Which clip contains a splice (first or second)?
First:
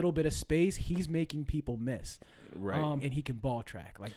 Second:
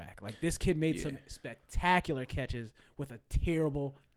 first